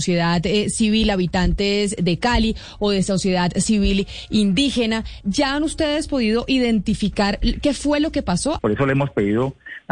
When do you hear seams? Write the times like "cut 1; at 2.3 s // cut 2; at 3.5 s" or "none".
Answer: cut 1; at 5.2 s // cut 2; at 8.6 s